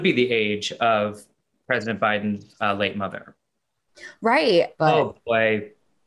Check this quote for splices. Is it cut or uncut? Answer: cut